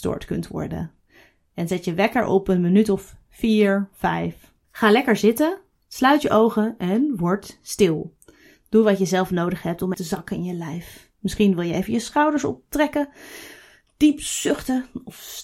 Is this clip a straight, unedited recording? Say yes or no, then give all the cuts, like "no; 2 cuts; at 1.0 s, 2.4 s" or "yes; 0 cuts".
no; 1 cut; at 9.9 s